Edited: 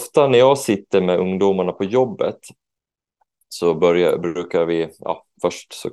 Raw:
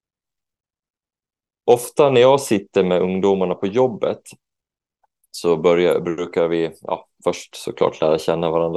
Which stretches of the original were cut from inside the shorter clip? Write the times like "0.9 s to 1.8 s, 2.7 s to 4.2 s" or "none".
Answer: none